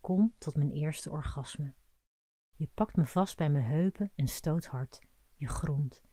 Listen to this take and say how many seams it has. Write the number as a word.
one